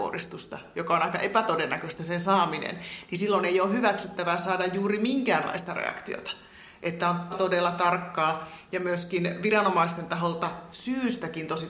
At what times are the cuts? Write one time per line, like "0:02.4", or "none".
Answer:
0:07.3